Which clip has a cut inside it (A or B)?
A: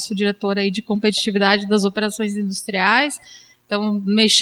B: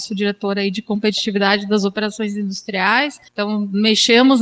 B